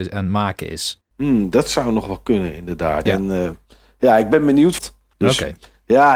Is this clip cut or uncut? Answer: cut